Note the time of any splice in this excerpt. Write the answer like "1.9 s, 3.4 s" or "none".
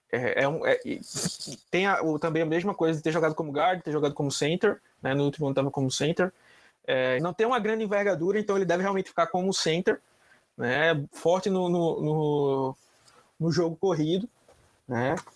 7.2 s